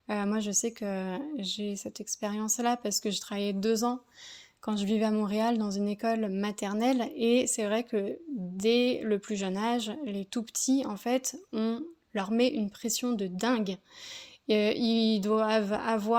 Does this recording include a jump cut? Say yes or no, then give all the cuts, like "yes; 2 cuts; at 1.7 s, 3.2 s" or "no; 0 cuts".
no; 0 cuts